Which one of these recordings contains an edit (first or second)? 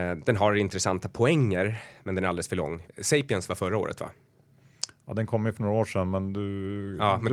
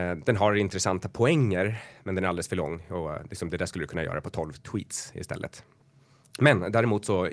first